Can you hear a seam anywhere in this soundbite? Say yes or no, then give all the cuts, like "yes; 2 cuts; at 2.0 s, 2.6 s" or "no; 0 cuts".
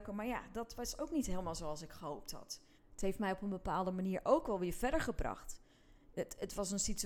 yes; 1 cut; at 2.8 s